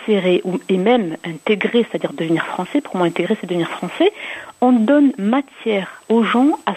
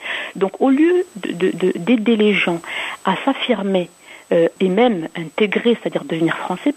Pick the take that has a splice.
second; 1 cut; at 4.6 s

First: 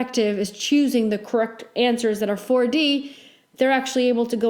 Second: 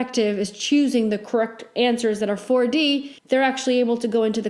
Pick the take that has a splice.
second; 1 cut; at 3.2 s

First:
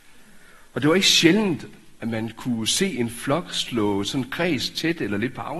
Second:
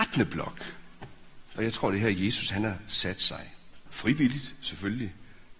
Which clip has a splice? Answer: second; 2 cuts; at 1.6 s, 3.9 s

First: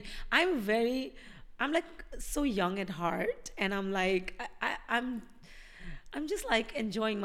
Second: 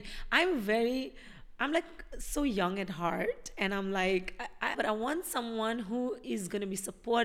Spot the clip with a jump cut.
second; 1 cut; at 4.7 s

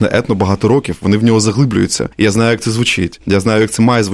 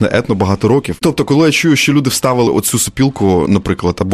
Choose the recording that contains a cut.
second; 1 cut; at 1.0 s

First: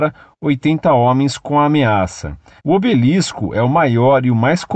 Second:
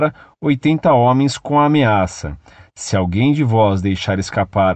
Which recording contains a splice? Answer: first; 1 cut; at 2.6 s

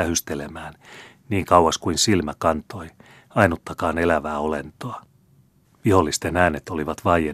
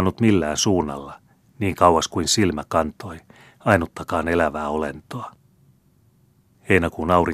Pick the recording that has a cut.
first; 2 cuts; at 1.2 s, 5.6 s

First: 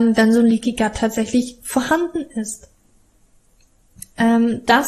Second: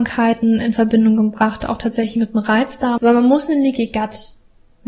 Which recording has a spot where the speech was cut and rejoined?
second; 1 cut; at 3.0 s

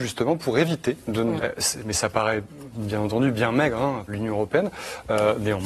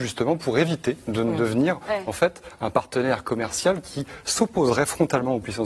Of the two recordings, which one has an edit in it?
first; 2 cuts; at 1.4 s, 4.1 s

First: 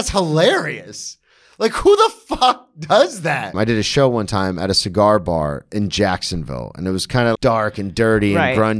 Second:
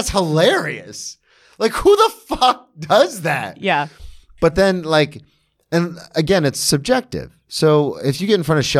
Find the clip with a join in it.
first; 2 cuts; at 3.5 s, 7.4 s

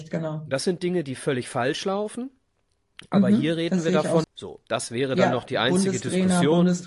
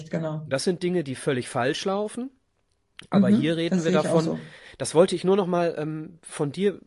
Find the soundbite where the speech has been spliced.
first; 1 cut; at 4.2 s

